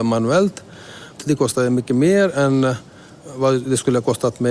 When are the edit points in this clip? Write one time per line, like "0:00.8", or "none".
0:01.2